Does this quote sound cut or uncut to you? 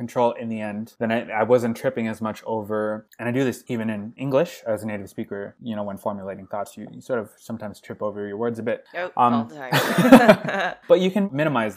uncut